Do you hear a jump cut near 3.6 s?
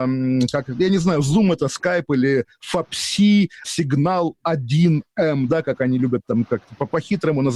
yes; 2 cuts; at 3.6 s, 5.5 s

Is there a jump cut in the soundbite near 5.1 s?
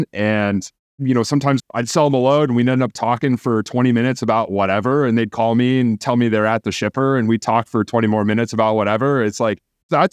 no; 0 cuts

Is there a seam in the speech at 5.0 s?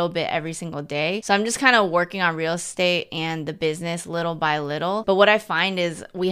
yes; 1 cut; at 5.0 s

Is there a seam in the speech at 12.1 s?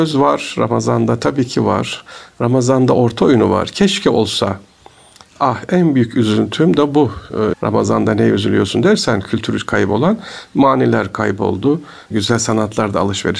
yes; 2 cuts; at 7.5 s, 12.1 s

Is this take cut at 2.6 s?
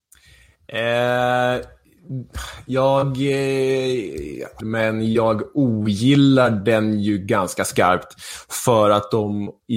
no; 1 cut; at 4.6 s

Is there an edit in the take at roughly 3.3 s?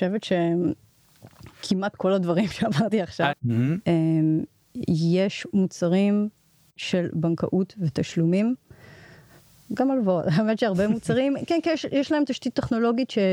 yes; 1 cut; at 3.3 s

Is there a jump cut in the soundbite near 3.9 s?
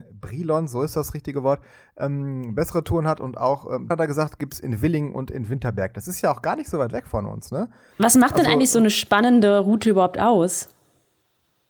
yes; 1 cut; at 3.9 s

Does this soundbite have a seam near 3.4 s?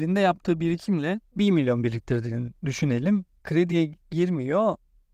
yes; 1 cut; at 3.4 s

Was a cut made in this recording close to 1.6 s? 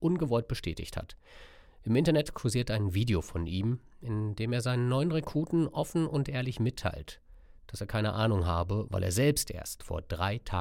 no; 1 cut; at 8.9 s

